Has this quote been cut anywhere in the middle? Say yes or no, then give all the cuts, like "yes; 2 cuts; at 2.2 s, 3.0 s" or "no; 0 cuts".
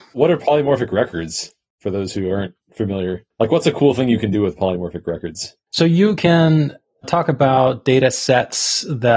no; 0 cuts